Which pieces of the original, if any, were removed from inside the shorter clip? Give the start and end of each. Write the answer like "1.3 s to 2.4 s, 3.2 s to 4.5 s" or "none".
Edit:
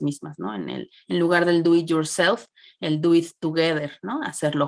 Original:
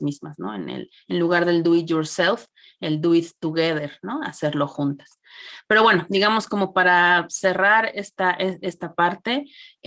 none